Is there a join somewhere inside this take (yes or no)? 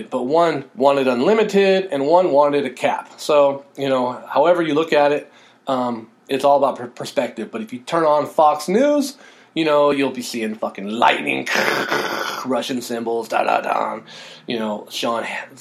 no